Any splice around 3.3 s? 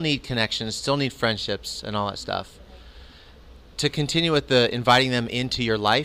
no; 0 cuts

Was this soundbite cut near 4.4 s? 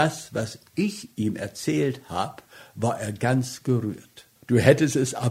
yes; 1 cut; at 4.4 s

